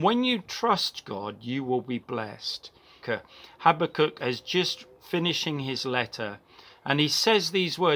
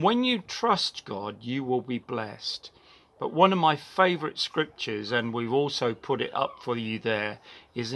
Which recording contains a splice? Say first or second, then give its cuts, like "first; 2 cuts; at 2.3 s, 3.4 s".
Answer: first; 1 cut; at 3.0 s